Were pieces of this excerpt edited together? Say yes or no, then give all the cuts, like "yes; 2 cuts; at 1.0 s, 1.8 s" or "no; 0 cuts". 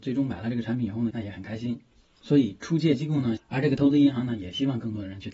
yes; 2 cuts; at 1.1 s, 3.4 s